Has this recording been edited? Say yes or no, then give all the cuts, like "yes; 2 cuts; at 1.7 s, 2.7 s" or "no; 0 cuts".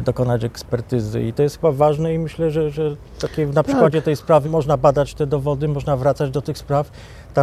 yes; 1 cut; at 4.4 s